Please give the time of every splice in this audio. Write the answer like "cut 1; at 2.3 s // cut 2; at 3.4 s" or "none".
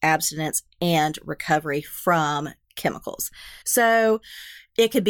cut 1; at 3.6 s